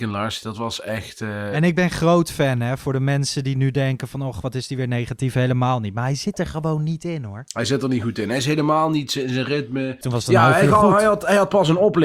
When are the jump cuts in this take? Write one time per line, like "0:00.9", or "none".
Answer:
0:10.0